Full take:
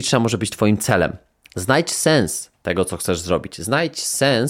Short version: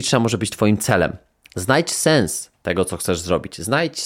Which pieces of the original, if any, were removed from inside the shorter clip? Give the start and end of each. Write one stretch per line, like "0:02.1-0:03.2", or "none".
none